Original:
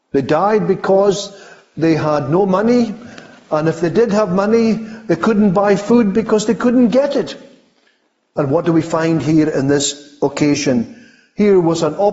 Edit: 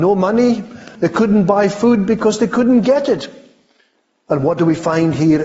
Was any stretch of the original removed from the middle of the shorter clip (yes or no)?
yes